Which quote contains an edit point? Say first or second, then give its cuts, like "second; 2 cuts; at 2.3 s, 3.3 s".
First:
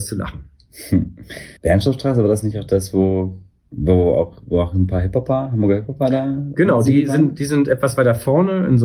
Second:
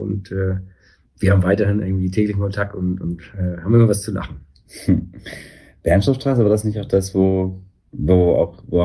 first; 1 cut; at 1.6 s